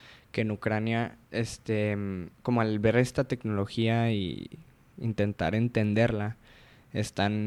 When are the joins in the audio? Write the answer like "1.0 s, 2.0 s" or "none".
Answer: 1.2 s, 2.3 s